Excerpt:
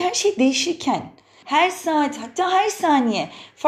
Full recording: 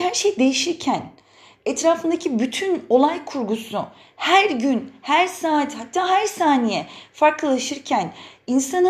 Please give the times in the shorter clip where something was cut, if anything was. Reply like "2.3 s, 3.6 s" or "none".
1.4 s